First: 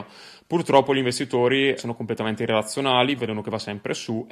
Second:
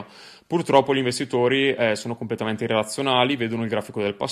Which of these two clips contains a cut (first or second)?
first